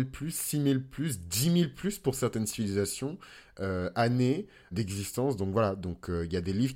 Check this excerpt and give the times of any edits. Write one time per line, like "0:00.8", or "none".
0:04.7

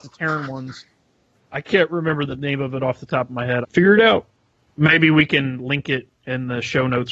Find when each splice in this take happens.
0:03.6

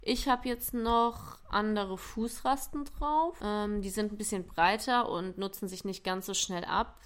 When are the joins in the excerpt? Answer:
none

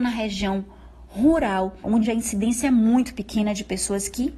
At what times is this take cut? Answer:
0:01.8

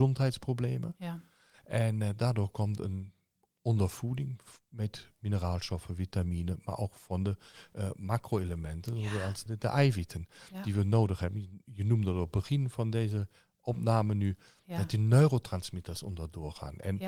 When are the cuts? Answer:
0:09.5

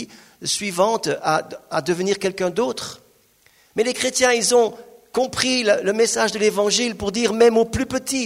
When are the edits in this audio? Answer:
none

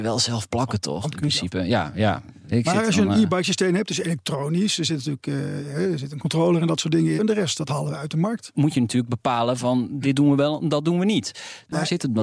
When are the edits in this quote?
0:07.2
0:08.5

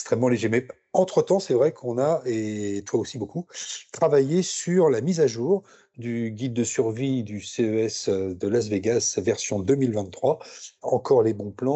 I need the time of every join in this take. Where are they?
0:10.8

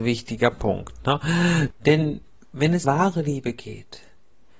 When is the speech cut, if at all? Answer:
0:01.8
0:02.8

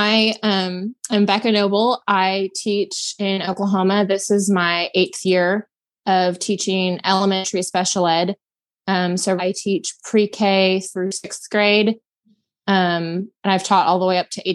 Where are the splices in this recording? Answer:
0:09.4

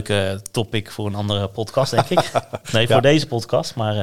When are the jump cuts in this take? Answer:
none

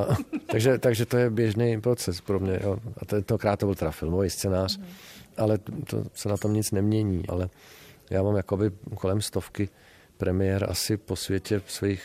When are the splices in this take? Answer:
0:07.3

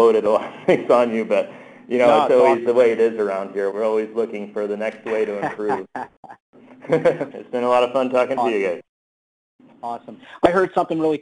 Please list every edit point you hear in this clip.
0:03.7
0:07.3

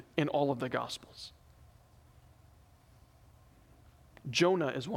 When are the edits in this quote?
none

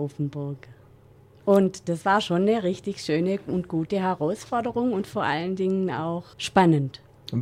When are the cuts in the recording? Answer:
0:06.3

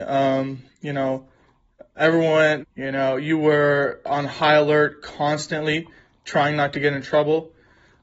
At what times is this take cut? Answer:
0:02.6

